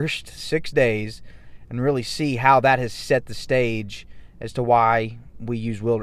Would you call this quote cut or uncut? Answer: uncut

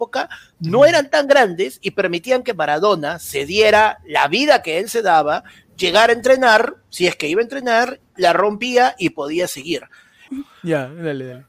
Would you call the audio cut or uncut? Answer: cut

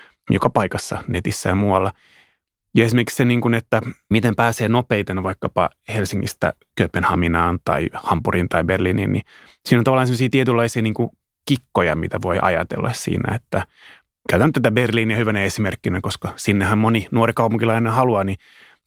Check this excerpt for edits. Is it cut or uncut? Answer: uncut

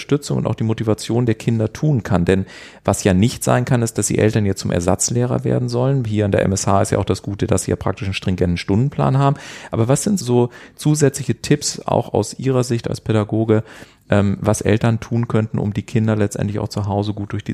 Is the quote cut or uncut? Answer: cut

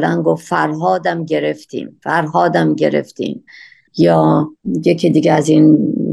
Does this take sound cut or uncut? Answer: uncut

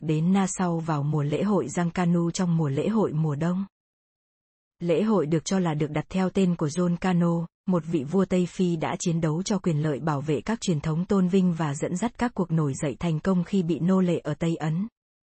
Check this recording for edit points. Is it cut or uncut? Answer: uncut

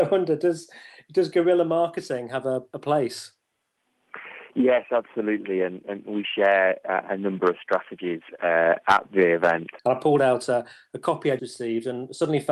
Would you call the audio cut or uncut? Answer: cut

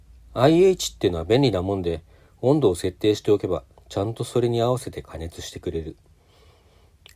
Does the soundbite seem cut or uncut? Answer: uncut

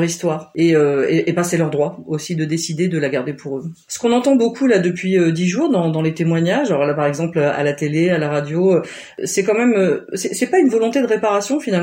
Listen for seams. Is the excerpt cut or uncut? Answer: uncut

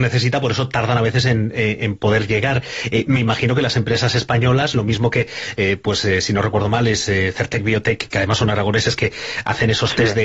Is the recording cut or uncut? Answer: uncut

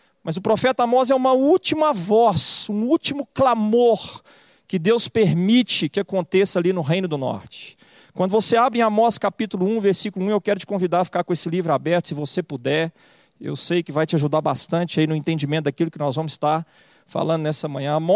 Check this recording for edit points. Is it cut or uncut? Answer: uncut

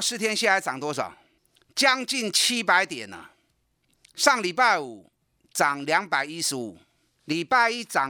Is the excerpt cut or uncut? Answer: uncut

